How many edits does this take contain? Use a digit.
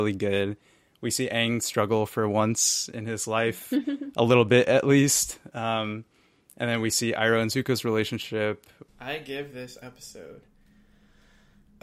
1